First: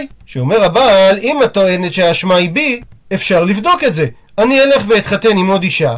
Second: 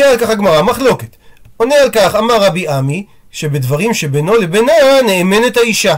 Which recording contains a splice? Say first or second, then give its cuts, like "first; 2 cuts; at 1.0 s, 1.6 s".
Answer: second; 1 cut; at 1.4 s